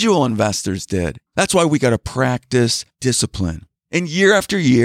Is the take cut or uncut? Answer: cut